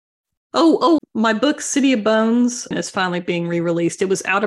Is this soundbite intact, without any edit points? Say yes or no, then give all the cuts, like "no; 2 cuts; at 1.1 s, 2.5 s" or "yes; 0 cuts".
no; 2 cuts; at 1.0 s, 2.7 s